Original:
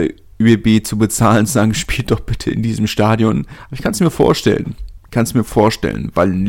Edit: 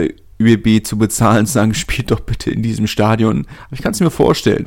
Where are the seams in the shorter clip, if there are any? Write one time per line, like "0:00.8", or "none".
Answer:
none

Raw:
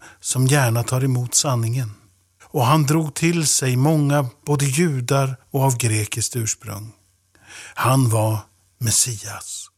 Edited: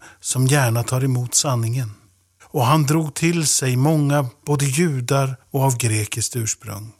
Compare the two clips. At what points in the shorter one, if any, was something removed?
none

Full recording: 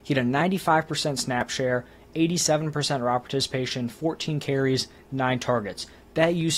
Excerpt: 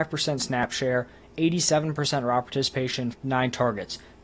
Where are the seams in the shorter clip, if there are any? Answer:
0:03.1

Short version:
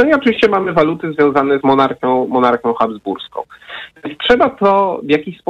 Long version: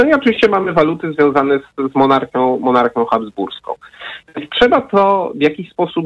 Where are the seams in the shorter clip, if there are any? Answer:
0:01.6

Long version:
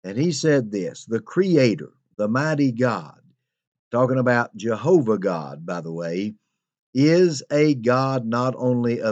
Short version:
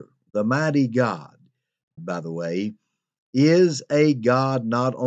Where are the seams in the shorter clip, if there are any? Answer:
0:02.0

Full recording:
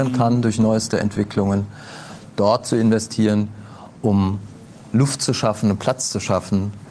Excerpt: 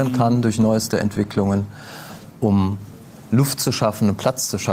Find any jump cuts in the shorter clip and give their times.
0:02.3

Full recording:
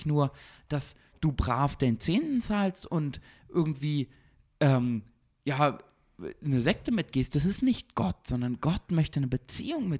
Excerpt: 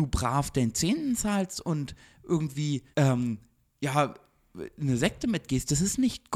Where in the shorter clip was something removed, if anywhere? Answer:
0:02.9

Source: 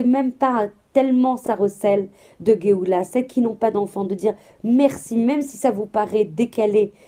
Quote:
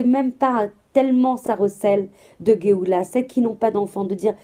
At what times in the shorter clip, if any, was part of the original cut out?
none

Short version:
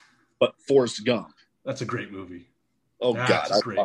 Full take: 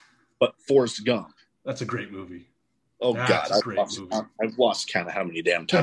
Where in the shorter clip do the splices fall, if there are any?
none

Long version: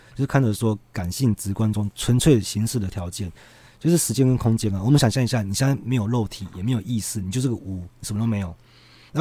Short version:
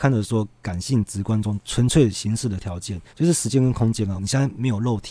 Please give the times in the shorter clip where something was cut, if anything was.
0:03.1
0:04.2

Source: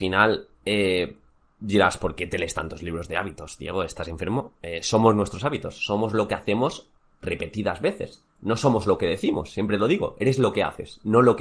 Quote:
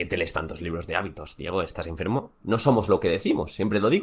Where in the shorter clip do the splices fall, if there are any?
0:02.4

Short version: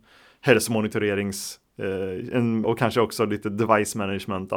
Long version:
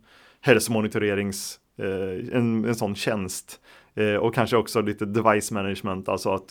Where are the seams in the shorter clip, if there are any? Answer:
0:02.6

